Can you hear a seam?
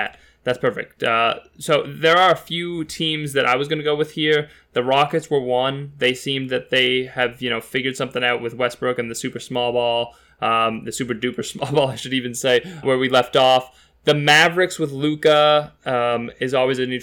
yes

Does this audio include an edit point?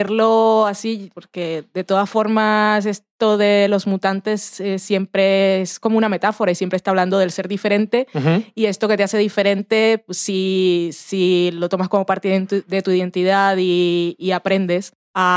yes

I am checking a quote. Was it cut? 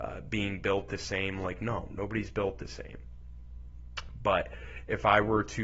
no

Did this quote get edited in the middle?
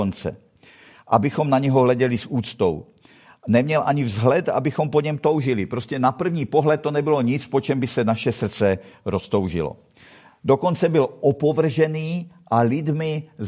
no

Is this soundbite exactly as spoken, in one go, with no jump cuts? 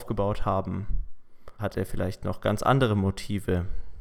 no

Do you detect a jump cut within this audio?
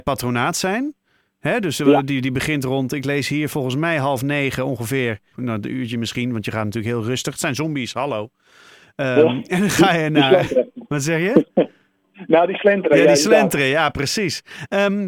yes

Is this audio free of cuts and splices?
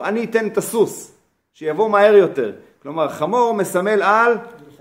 yes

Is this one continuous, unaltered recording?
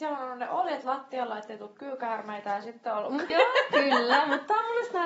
no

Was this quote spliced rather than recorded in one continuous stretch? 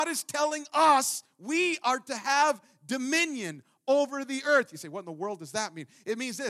no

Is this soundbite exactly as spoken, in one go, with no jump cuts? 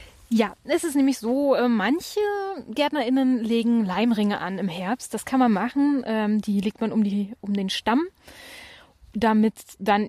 yes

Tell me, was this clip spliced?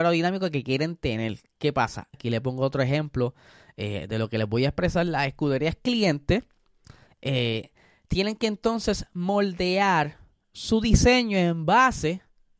yes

